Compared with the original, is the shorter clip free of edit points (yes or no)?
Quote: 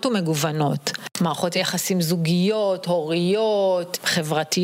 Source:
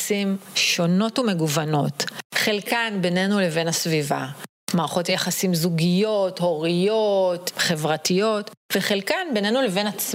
no